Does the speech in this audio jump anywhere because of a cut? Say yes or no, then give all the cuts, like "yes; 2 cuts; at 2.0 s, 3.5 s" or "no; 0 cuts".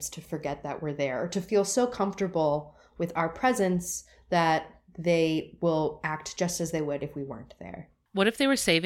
no; 0 cuts